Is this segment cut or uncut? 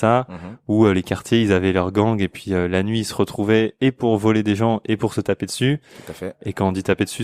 uncut